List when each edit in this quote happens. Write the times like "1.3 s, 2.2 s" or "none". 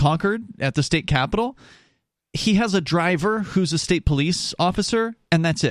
none